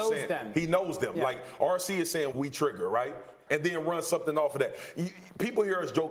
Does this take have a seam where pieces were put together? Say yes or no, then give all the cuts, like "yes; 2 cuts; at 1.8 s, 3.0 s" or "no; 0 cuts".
yes; 2 cuts; at 2.3 s, 3.5 s